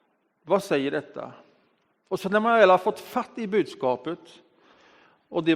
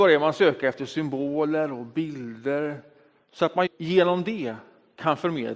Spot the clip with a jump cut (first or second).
second